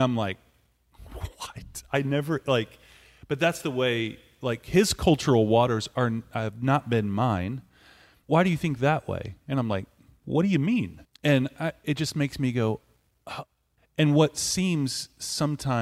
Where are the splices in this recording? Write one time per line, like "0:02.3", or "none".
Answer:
0:08.2
0:11.0
0:13.8